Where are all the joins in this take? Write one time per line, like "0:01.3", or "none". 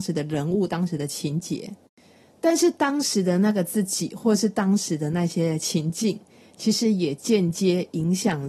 none